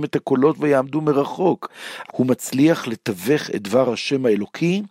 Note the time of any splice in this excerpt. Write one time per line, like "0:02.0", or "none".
0:02.1